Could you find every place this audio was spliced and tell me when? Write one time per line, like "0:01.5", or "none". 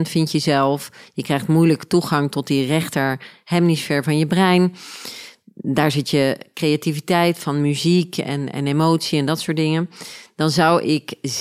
none